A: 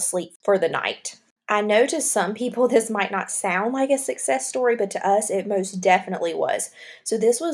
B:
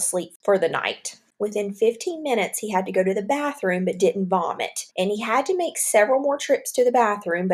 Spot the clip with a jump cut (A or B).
B